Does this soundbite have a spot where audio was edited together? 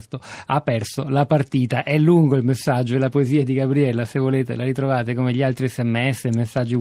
no; 0 cuts

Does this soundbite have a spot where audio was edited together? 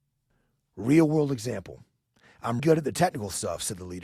yes; 1 cut; at 2.6 s

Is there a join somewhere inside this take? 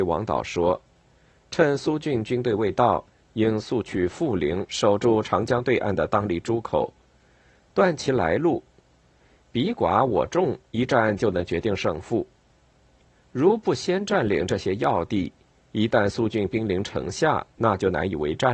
no; 0 cuts

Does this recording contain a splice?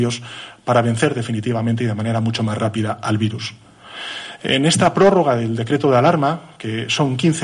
no; 0 cuts

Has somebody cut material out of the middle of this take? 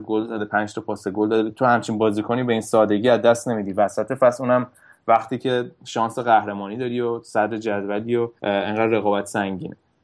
yes; 1 cut; at 8.4 s

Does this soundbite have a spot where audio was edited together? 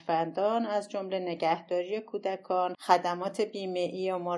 yes; 1 cut; at 2.7 s

